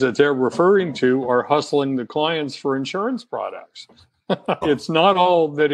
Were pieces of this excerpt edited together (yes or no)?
yes